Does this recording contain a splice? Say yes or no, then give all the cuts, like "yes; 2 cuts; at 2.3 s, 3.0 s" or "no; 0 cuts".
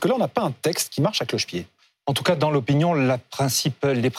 no; 0 cuts